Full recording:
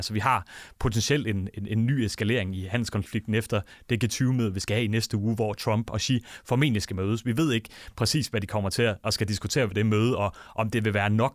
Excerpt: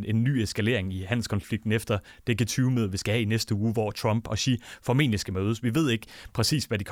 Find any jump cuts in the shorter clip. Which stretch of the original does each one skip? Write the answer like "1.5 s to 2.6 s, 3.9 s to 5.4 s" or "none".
none